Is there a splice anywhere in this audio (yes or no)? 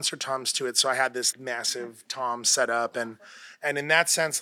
yes